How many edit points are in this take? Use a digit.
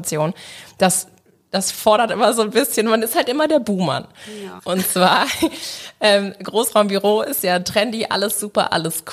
1